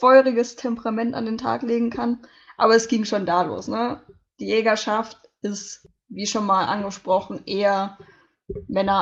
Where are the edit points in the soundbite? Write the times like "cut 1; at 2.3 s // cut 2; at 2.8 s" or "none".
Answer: none